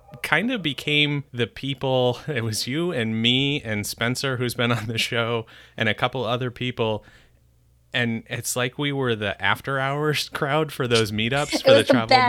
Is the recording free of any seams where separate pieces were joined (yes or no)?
no